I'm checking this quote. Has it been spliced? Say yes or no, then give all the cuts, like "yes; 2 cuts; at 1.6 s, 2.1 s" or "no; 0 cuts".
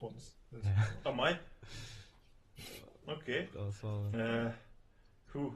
yes; 1 cut; at 4.1 s